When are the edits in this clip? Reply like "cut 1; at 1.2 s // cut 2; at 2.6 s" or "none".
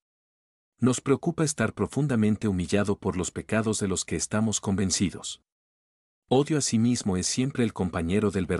none